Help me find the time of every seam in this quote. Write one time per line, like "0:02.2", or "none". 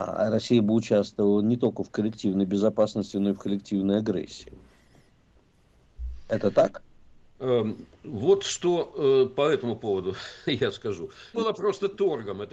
0:11.3

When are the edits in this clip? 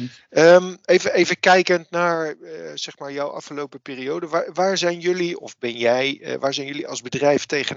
none

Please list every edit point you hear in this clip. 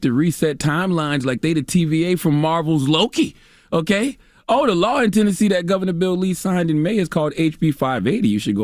none

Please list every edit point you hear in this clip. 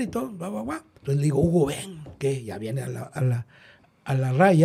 0:01.0
0:03.2

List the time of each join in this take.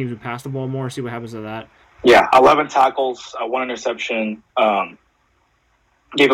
0:01.8
0:04.5

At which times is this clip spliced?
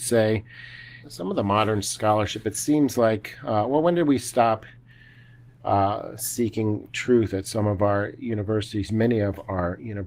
0:01.0

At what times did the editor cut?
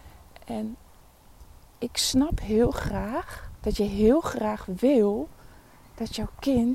0:03.6

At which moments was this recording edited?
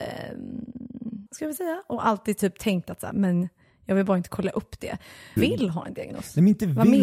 0:01.3
0:03.1
0:05.4

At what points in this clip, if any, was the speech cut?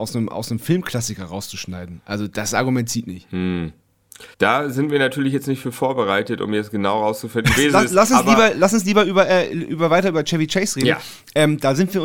0:04.3
0:07.6

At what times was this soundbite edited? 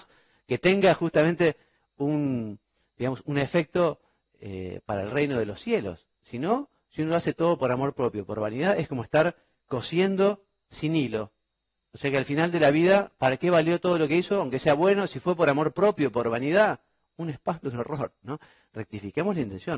none

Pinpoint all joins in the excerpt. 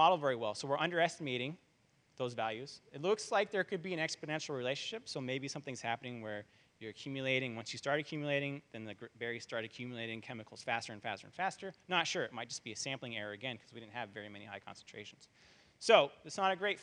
none

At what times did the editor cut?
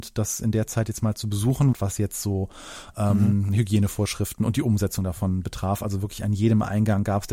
0:01.7

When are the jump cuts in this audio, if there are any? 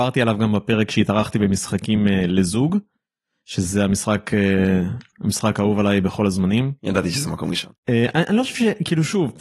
0:05.1

